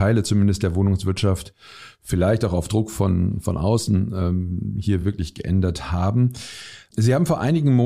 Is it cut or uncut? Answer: uncut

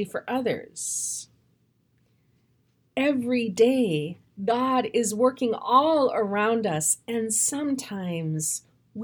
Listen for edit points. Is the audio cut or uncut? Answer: uncut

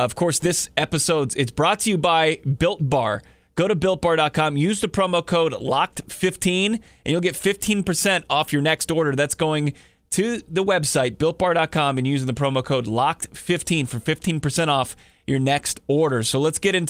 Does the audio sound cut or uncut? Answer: uncut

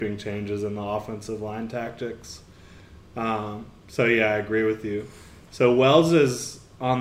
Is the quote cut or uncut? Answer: uncut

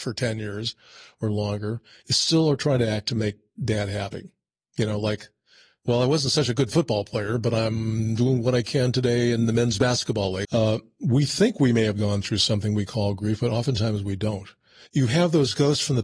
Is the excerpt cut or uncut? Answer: cut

